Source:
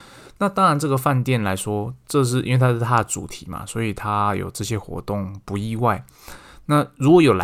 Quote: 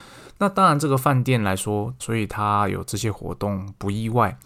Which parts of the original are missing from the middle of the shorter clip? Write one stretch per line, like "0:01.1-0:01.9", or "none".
0:02.0-0:03.7